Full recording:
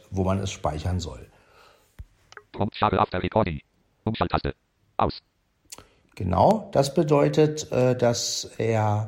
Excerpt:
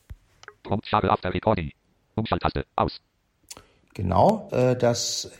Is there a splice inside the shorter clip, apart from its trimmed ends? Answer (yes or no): yes